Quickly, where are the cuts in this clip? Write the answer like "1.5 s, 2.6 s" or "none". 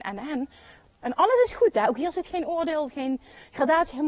1.0 s